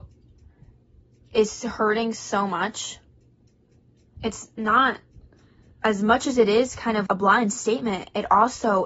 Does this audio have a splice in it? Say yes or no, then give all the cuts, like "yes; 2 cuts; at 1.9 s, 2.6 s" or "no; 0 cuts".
yes; 3 cuts; at 4.2 s, 5.8 s, 7.1 s